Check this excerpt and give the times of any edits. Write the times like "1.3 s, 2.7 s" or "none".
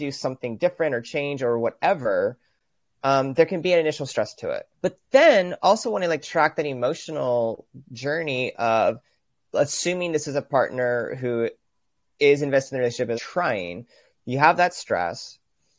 4.7 s, 13.1 s

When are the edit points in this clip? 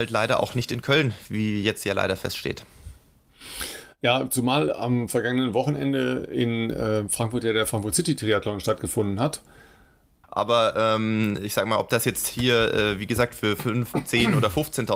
10.2 s

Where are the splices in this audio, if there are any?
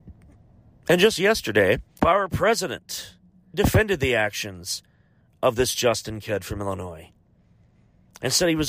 2.0 s, 3.5 s

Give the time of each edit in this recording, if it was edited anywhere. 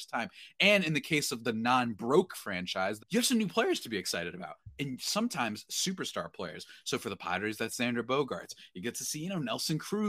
3.0 s

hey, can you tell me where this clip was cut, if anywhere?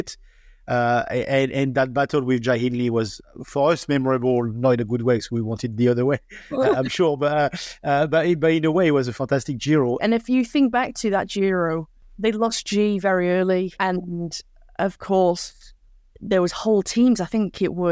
10.0 s

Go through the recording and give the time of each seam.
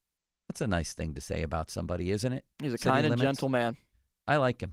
2.5 s

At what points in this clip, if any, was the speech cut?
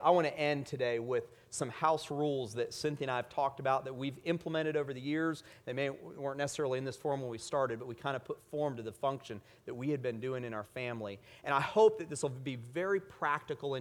none

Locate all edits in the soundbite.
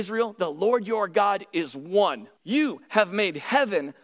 2.4 s

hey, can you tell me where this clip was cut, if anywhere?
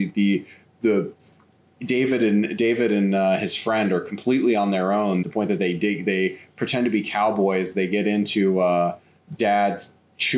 5.2 s

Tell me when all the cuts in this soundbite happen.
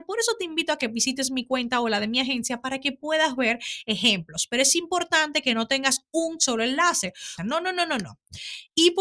7.4 s

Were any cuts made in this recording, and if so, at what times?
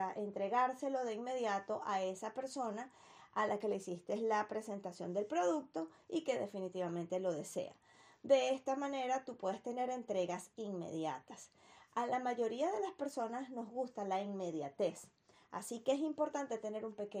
none

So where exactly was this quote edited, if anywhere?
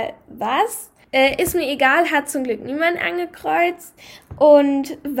1.0 s

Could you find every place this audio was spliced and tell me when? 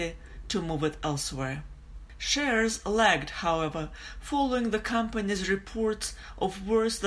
none

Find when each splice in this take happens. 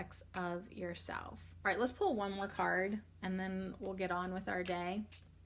none

